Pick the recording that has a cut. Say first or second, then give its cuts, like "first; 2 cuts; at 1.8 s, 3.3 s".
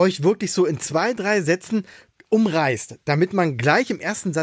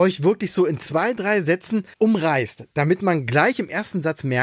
second; 1 cut; at 1.9 s